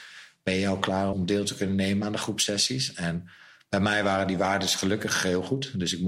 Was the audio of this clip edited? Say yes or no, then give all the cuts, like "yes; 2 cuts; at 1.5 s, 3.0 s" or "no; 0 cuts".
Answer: yes; 1 cut; at 1.1 s